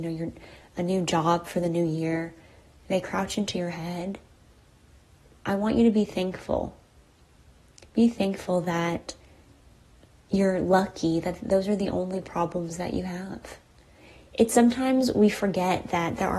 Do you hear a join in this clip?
no; 0 cuts

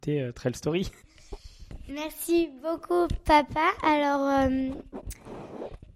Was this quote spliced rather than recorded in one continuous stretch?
no; 0 cuts

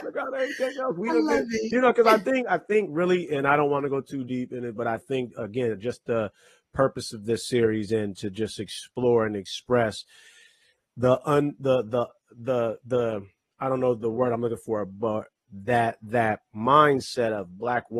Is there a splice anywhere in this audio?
no; 0 cuts

